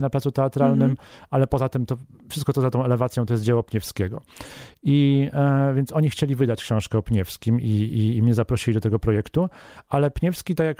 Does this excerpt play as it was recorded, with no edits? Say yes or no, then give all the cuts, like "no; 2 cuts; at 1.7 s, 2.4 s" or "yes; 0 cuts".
yes; 0 cuts